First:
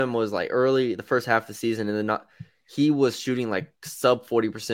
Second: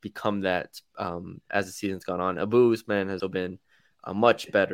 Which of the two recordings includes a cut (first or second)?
second